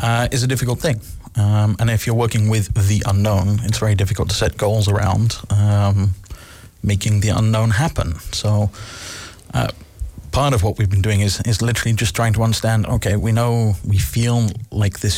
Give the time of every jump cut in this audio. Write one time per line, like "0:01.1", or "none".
none